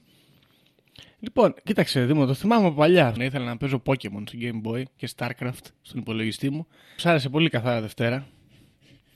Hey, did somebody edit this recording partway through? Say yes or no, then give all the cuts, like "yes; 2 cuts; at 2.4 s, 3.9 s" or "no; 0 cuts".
yes; 2 cuts; at 3.2 s, 7.0 s